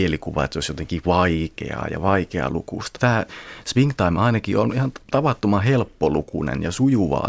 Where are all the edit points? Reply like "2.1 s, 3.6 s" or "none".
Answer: 3.0 s